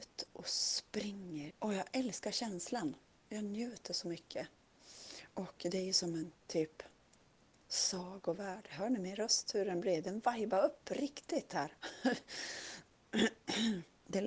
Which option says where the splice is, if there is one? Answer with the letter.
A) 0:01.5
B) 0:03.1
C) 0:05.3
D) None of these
A